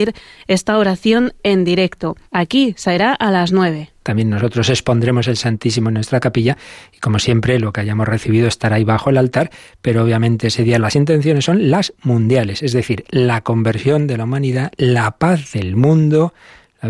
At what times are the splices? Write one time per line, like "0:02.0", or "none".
0:02.3
0:04.0